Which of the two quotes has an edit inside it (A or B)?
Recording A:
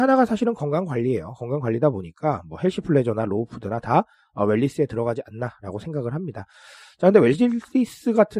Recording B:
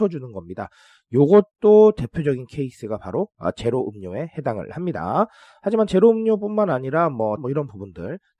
B